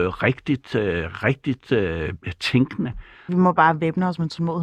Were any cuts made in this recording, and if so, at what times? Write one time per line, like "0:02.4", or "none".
0:03.3